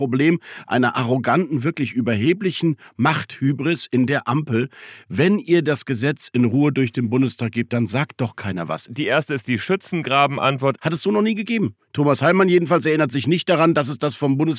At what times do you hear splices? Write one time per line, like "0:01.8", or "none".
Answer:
0:08.9
0:10.8